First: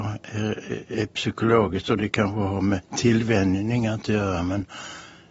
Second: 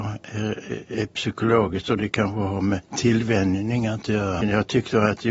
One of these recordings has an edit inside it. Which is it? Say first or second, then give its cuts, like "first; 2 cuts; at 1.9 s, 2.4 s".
second; 1 cut; at 4.4 s